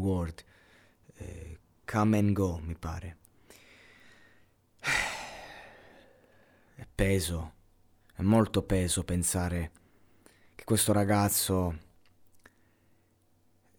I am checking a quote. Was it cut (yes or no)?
yes